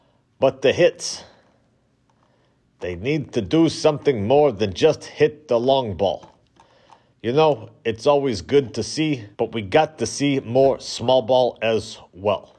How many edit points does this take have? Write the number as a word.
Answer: two